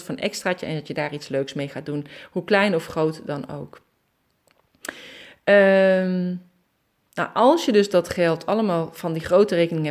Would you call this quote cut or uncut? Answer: uncut